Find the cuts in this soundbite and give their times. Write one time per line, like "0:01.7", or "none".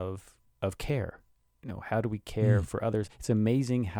0:03.1